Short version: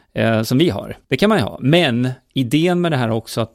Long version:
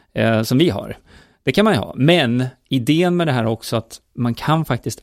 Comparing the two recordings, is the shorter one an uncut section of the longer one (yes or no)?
no